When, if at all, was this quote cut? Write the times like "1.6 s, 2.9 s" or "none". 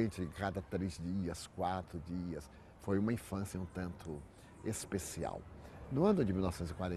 3.5 s

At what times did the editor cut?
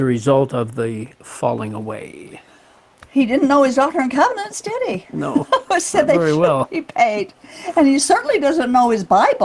none

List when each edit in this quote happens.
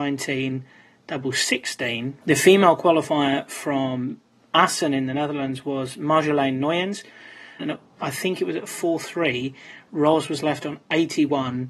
2.2 s, 7.6 s

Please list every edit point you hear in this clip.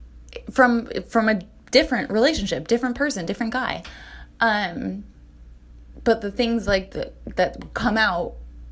6.9 s

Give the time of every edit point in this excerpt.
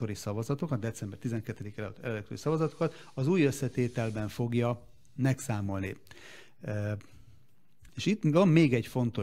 7.9 s

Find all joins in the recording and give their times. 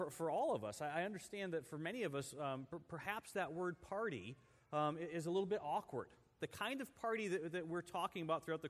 6.4 s

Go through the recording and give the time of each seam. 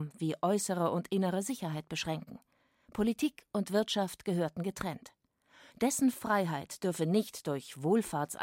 5.7 s

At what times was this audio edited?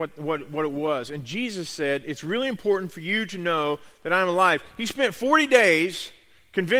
none

